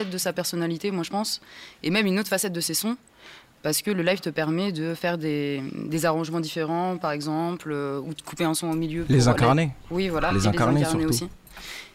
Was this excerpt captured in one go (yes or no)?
yes